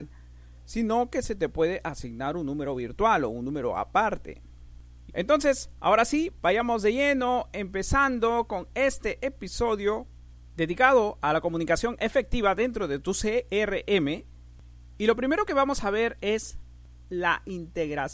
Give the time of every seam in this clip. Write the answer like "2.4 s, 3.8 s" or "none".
5.1 s